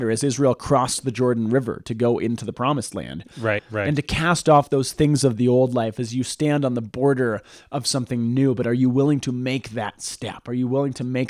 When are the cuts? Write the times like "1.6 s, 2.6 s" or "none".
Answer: 3.6 s